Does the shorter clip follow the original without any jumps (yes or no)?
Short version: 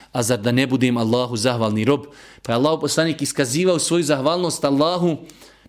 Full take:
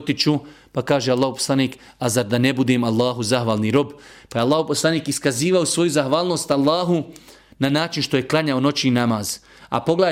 yes